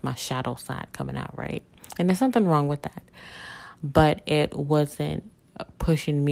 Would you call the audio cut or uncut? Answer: uncut